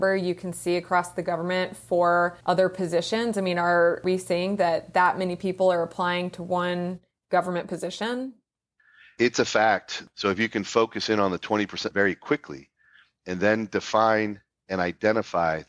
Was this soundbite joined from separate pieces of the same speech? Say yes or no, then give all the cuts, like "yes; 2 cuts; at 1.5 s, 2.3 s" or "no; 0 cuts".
yes; 1 cut; at 10.1 s